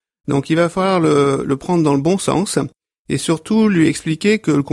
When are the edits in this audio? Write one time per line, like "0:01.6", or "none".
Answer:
none

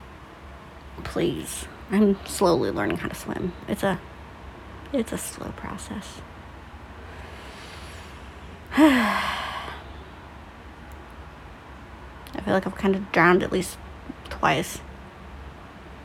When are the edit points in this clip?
0:01.9

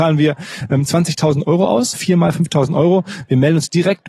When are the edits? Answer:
0:01.9

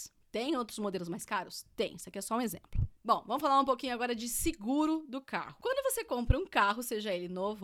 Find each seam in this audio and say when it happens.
none

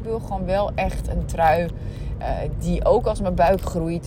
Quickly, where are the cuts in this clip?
none

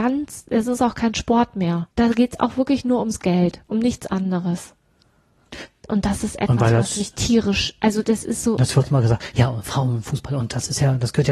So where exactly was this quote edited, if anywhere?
0:01.9

